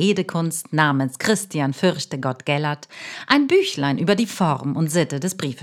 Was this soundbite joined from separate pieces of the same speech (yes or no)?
no